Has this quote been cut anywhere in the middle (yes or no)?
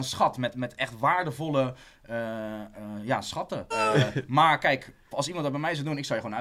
yes